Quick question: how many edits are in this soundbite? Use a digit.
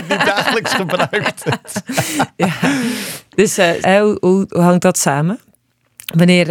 1